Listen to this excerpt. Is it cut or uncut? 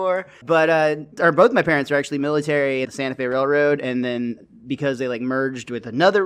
cut